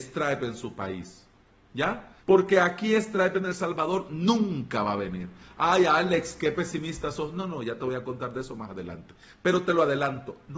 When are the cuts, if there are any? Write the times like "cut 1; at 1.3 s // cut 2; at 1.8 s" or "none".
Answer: cut 1; at 2.2 s